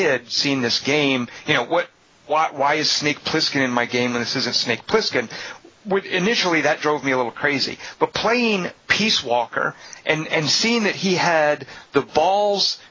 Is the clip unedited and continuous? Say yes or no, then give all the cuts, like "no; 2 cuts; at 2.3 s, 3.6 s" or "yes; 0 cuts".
yes; 0 cuts